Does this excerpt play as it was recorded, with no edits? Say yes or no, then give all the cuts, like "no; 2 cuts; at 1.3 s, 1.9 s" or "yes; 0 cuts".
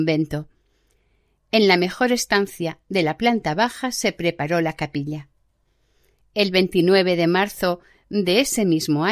yes; 0 cuts